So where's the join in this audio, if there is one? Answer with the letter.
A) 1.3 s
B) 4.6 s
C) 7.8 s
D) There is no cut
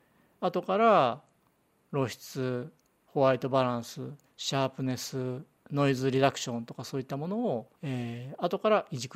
C